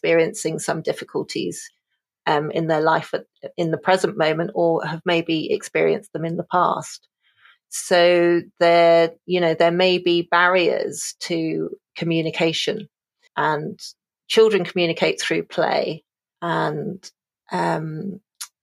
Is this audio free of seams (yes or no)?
no